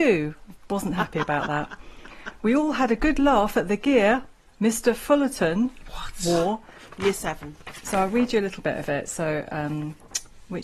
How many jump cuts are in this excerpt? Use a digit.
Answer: 1